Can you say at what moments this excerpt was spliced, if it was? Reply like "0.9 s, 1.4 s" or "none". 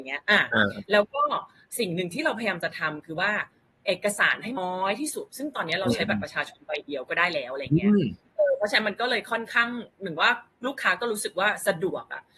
4.6 s